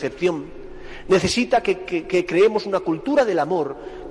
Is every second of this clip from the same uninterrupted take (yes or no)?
yes